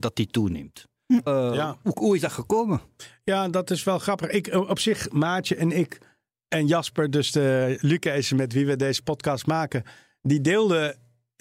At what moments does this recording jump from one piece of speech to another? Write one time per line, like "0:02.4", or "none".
0:01.3